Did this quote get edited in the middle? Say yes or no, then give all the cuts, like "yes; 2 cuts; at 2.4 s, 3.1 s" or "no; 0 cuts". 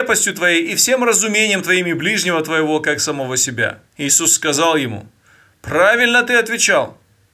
yes; 1 cut; at 3.9 s